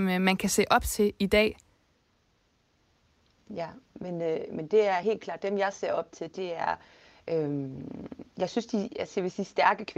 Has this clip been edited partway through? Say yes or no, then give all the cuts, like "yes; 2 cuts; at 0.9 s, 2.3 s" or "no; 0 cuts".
yes; 1 cut; at 8.3 s